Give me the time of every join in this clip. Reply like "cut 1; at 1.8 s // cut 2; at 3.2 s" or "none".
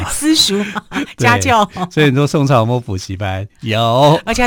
none